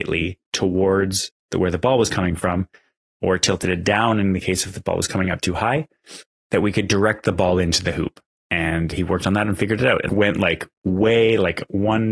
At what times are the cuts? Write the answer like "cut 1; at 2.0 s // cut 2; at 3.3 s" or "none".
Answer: cut 1; at 8.9 s // cut 2; at 10.1 s